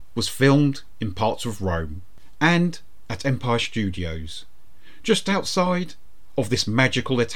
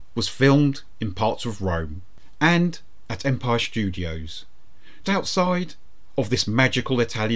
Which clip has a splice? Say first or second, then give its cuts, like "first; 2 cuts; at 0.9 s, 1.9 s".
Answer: second; 1 cut; at 5.0 s